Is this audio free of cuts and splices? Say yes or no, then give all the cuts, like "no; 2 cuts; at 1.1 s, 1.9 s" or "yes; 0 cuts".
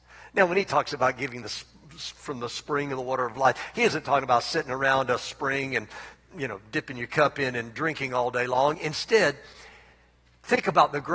yes; 0 cuts